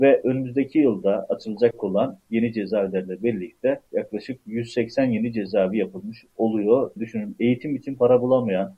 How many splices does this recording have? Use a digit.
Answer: 2